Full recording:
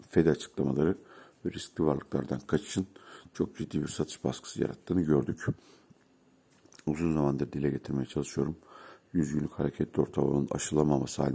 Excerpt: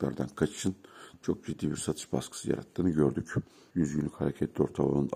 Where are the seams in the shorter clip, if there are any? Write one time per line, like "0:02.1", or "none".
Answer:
0:03.7